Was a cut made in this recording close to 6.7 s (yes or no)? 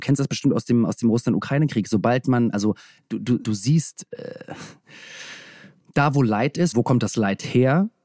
yes